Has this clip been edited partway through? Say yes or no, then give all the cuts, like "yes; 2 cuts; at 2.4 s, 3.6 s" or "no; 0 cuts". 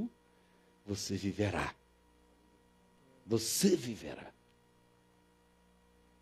no; 0 cuts